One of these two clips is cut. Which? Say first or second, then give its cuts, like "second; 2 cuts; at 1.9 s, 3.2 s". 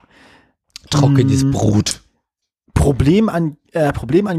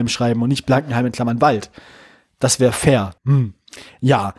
second; 1 cut; at 3.2 s